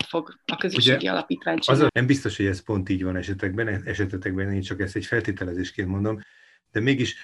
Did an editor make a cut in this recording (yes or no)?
yes